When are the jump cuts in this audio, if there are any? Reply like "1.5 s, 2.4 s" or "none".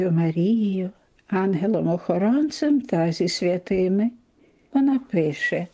4.7 s